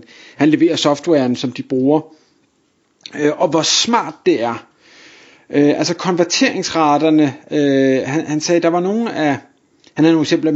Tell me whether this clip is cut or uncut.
uncut